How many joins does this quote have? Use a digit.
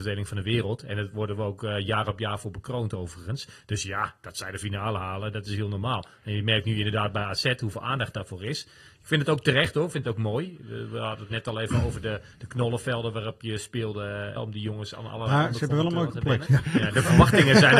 2